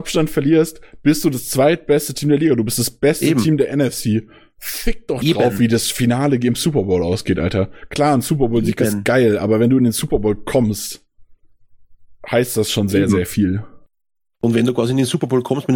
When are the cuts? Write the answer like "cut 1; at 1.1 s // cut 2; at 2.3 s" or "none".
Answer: none

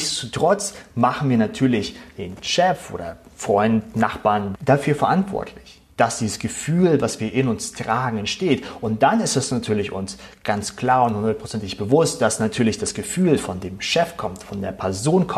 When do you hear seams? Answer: cut 1; at 4.5 s // cut 2; at 5.9 s

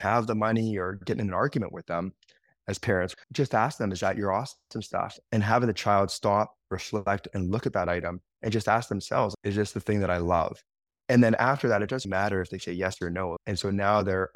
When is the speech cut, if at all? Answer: cut 1; at 3.1 s // cut 2; at 12.0 s // cut 3; at 13.4 s

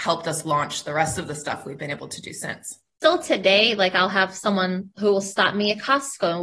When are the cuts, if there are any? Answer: none

